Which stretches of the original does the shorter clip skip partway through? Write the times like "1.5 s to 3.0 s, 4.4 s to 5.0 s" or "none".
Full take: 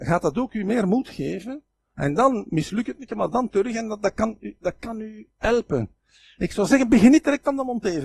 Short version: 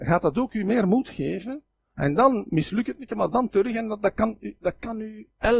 none